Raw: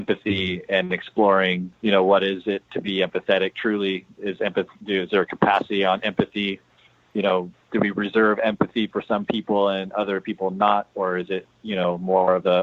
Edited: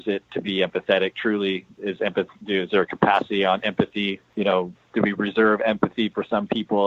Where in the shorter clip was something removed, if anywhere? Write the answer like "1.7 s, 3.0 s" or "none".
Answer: 4.3 s